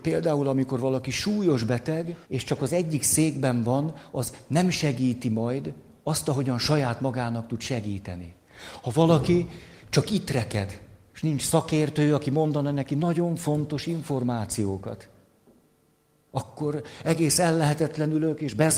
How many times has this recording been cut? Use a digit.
1